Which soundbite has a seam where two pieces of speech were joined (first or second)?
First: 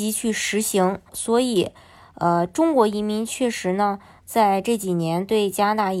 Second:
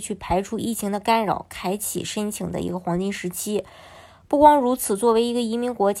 first